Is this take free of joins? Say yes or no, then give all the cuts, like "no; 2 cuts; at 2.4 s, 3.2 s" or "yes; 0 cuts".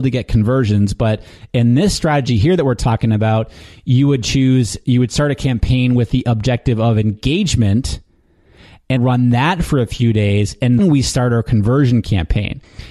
no; 2 cuts; at 9.0 s, 10.8 s